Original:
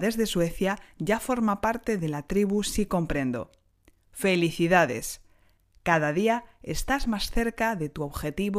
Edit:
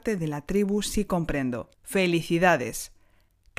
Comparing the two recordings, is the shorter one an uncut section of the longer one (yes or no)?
no